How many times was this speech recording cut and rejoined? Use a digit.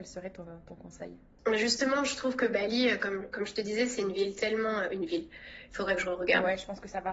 1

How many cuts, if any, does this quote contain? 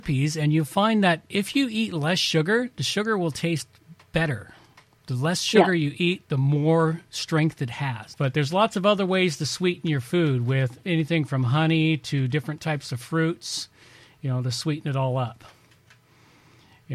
1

